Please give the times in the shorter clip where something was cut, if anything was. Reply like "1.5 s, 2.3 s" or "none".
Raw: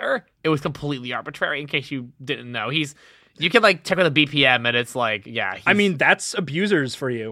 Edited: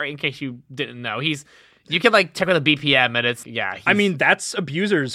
3.4 s